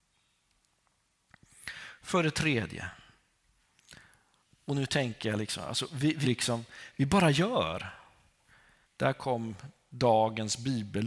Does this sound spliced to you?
yes; 2 cuts; at 6.2 s, 8.8 s

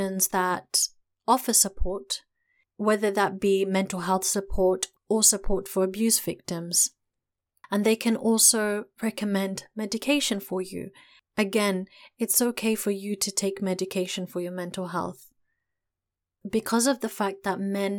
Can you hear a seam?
no; 0 cuts

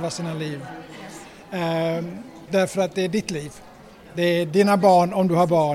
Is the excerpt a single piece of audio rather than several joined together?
no; 1 cut; at 2.5 s

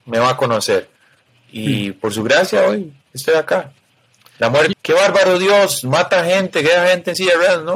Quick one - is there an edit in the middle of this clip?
yes; 1 cut; at 4.7 s

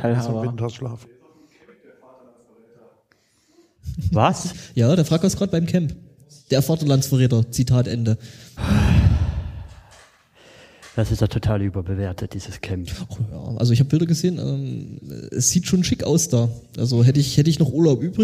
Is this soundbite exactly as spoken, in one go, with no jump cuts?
yes; 0 cuts

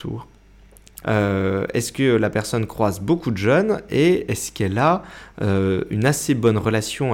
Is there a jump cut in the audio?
yes; 1 cut; at 1.0 s

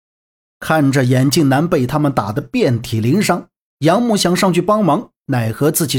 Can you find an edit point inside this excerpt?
no; 0 cuts

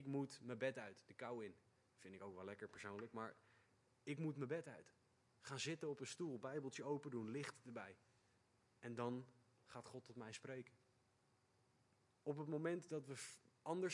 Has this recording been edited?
yes; 1 cut; at 12.1 s

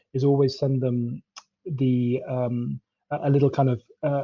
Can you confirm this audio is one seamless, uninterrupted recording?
yes; 0 cuts

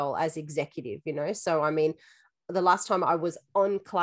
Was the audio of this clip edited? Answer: no; 0 cuts

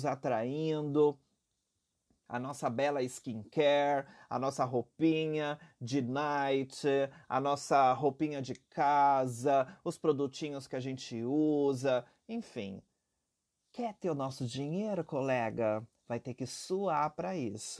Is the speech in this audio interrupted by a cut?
no; 0 cuts

